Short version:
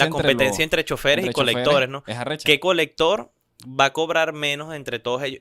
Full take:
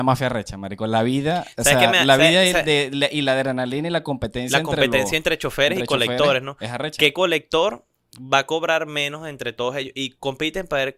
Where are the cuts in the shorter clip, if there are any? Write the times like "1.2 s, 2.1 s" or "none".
none